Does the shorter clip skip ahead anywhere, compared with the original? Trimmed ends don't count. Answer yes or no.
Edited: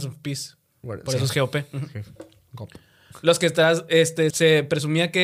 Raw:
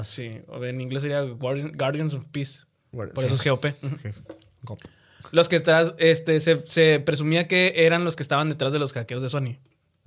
yes